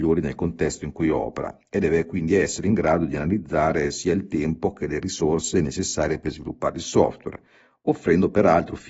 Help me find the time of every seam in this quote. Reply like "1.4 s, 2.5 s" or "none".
none